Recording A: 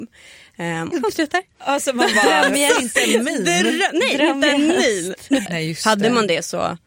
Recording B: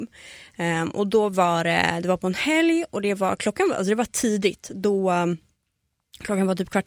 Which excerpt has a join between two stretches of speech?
A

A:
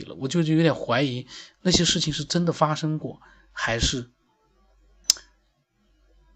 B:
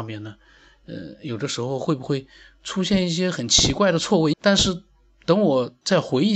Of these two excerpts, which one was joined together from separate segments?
B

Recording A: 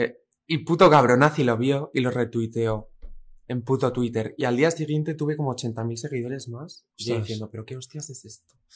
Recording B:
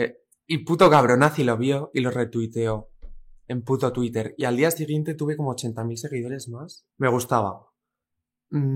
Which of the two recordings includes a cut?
B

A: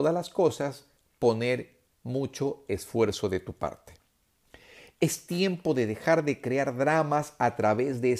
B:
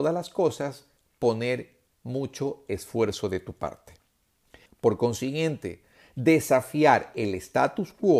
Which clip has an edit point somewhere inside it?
B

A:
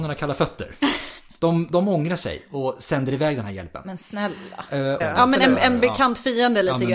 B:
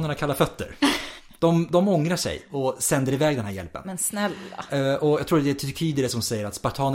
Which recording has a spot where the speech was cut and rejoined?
A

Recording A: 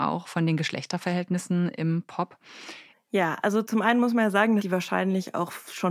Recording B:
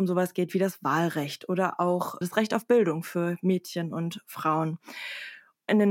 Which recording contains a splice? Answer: A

